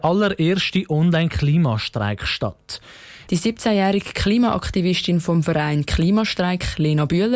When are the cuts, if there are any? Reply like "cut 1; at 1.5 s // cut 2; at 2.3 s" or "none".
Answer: cut 1; at 3.3 s